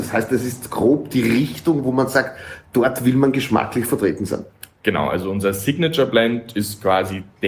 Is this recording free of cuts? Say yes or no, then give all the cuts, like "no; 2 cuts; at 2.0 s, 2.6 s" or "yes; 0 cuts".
yes; 0 cuts